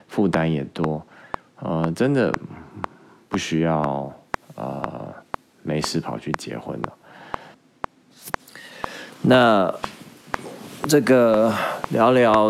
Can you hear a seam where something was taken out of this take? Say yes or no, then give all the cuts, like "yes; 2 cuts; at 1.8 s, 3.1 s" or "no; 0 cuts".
no; 0 cuts